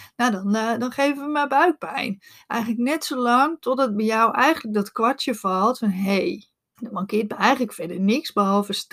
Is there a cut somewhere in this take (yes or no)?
yes